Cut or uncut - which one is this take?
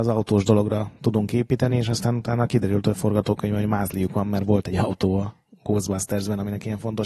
uncut